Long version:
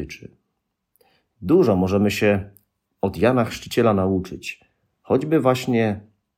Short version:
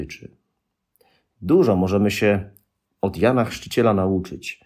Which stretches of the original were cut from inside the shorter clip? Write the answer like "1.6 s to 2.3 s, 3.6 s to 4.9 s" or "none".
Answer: none